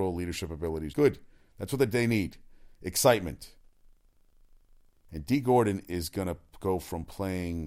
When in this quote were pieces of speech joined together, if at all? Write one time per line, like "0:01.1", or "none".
0:00.9